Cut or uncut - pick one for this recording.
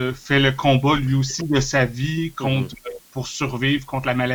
uncut